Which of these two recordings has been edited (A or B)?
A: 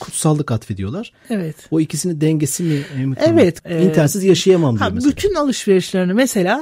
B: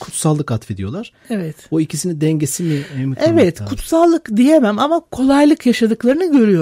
A